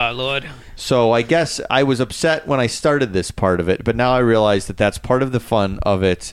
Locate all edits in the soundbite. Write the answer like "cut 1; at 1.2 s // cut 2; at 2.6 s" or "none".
none

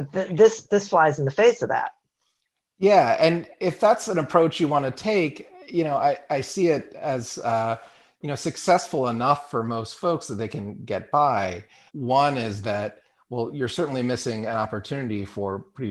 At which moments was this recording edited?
cut 1; at 11.9 s

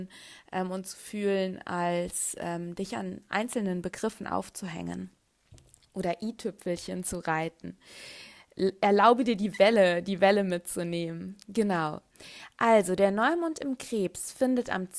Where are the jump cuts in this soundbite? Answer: none

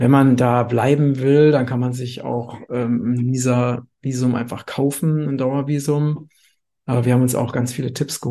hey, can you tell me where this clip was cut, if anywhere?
cut 1; at 6.8 s

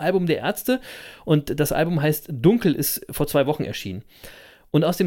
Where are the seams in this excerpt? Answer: none

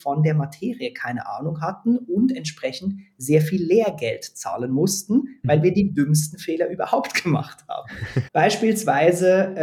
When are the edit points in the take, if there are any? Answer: cut 1; at 8.3 s

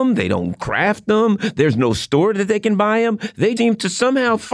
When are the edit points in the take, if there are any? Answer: cut 1; at 3.6 s

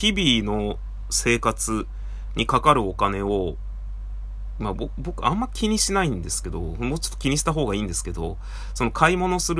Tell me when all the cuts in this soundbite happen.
none

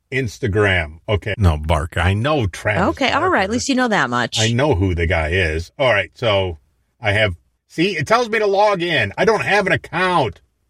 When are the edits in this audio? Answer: cut 1; at 1.3 s

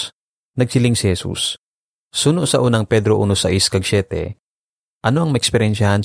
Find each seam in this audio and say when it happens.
cut 1; at 1.9 s

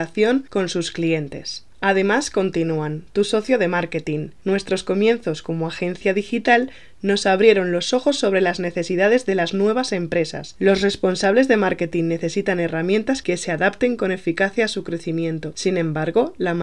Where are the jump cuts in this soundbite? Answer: none

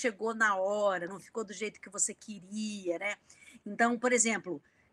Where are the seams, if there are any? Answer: none

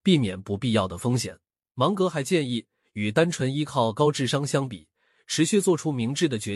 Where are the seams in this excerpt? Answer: none

